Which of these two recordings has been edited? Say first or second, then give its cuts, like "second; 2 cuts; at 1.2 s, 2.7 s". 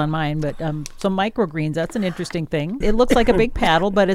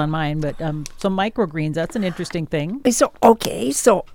first; 1 cut; at 2.8 s